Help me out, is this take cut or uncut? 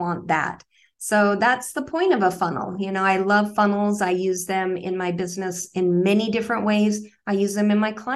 uncut